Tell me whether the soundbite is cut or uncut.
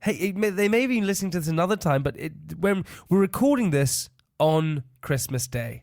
uncut